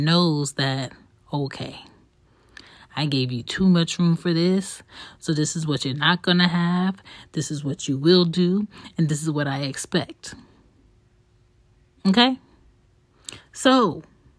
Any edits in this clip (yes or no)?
no